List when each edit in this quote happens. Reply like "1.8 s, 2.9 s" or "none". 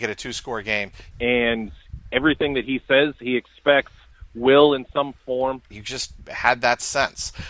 1.1 s, 5.7 s